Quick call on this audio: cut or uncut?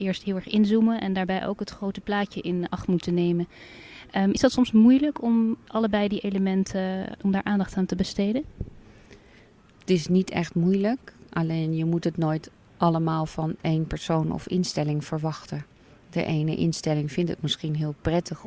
uncut